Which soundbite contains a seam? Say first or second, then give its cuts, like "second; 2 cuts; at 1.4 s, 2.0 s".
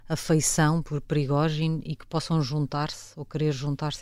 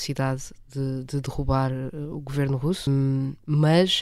second; 1 cut; at 2.9 s